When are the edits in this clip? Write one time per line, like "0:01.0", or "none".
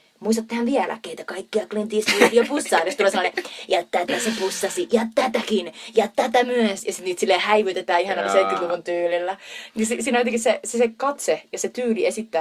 0:09.7

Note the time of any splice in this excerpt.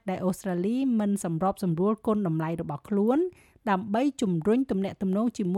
none

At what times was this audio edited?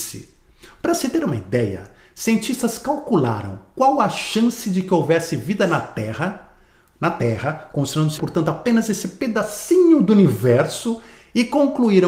0:08.2

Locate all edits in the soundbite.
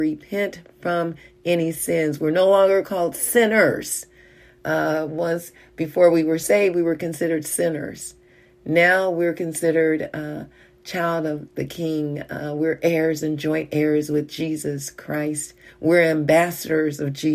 none

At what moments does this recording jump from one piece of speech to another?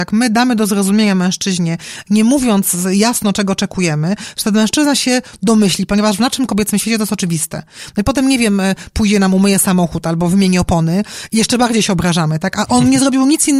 0:08.9

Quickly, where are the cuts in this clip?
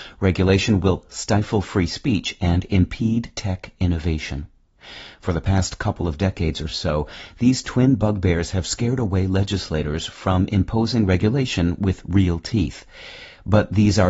none

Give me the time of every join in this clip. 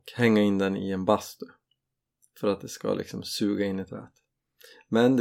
none

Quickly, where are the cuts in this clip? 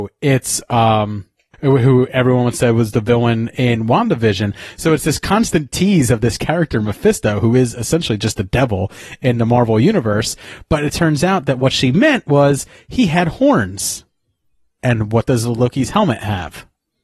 0:01.5

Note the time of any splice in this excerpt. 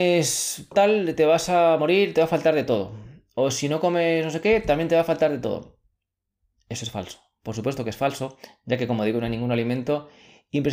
none

